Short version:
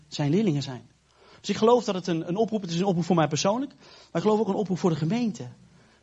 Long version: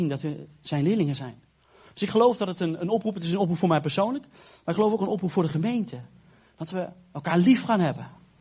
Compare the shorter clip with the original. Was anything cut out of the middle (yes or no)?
no